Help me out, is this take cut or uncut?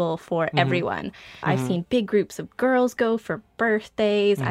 cut